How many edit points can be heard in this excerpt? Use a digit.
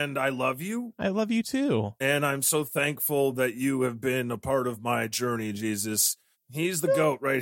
1